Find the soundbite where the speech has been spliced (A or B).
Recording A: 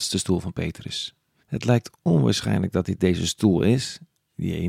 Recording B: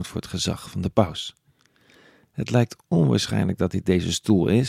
A